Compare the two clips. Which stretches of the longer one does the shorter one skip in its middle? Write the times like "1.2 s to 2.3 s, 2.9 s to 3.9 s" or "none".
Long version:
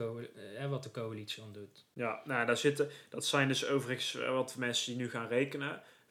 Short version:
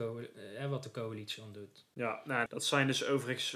2.5 s to 3.1 s